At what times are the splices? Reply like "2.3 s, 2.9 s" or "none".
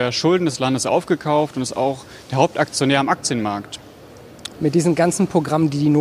4.5 s